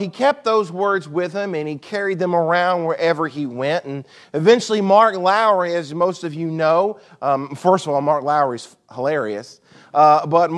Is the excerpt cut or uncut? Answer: uncut